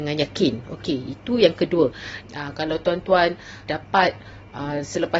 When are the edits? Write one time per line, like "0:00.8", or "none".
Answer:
0:02.2
0:03.7